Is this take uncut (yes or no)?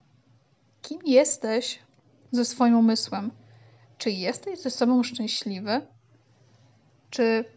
no